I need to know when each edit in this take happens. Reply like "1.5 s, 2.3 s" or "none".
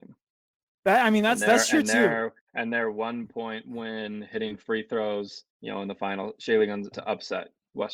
5.5 s, 6.9 s